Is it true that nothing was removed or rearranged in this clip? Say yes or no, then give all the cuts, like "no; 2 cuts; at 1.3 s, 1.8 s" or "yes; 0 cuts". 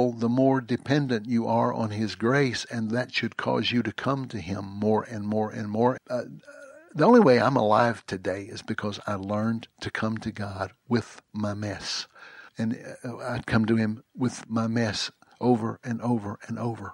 no; 2 cuts; at 6.0 s, 12.5 s